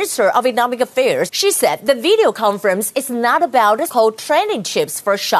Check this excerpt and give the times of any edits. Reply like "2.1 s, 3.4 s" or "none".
1.3 s, 3.9 s